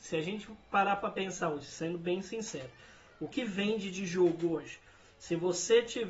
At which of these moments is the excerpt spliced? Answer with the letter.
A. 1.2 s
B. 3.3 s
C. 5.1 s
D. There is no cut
B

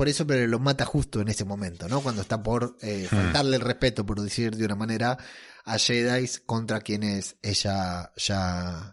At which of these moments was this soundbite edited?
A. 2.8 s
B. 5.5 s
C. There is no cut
C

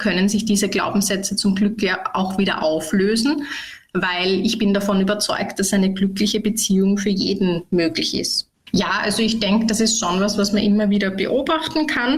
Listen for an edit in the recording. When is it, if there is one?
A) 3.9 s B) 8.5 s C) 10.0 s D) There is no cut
B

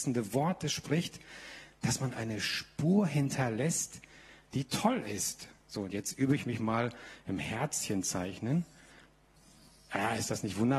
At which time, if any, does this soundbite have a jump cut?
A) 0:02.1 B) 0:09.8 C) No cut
A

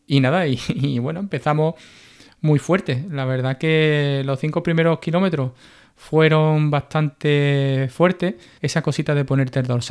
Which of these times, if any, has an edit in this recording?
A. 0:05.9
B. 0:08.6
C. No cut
B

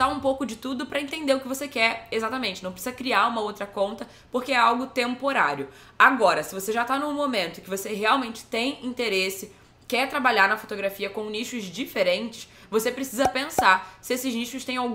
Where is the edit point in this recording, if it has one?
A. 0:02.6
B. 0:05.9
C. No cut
C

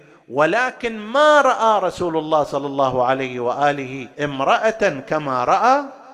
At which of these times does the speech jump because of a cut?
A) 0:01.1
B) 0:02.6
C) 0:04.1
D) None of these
C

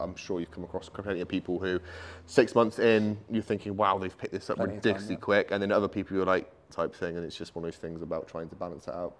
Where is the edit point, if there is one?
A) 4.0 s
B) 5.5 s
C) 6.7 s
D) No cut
C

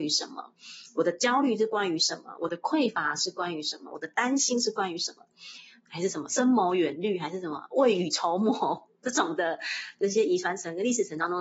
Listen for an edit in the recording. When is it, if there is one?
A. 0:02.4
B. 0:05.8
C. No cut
B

